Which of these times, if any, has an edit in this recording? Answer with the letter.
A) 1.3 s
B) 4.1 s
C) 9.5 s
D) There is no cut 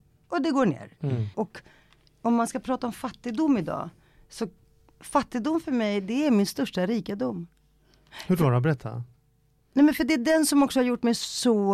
A